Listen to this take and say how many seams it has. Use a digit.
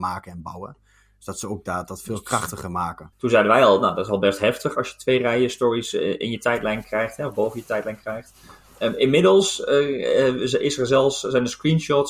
1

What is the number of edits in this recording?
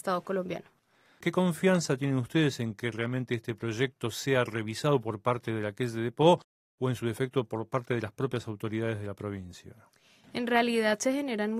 0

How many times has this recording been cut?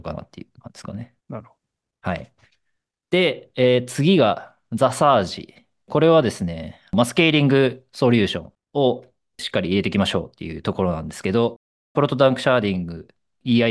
2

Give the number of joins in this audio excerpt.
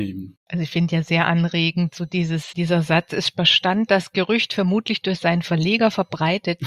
1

